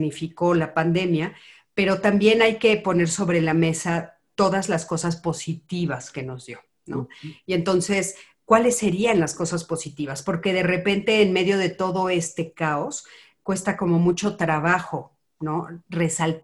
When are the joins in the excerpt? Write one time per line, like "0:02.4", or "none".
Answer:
none